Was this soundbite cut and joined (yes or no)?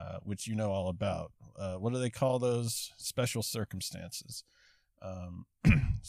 no